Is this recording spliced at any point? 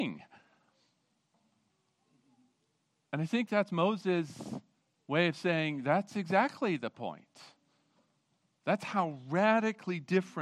no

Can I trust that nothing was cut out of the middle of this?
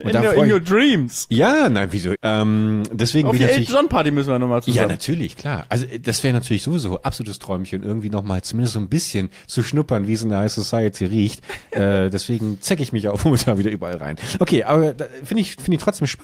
no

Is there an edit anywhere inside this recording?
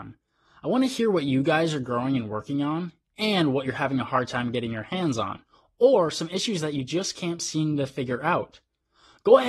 no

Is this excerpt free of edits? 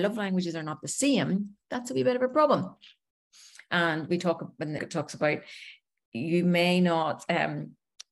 no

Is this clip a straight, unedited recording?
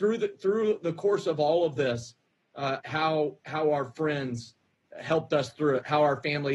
no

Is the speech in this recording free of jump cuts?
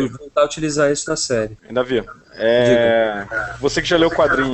no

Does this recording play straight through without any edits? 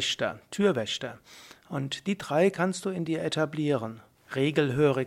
no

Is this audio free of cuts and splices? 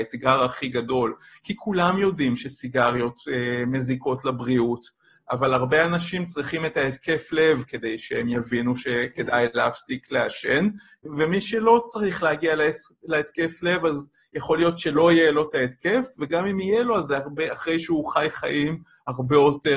yes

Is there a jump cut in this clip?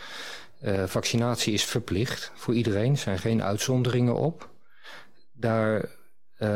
no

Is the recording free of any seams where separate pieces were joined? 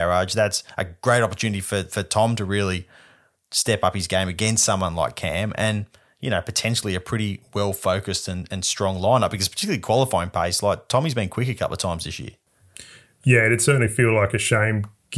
yes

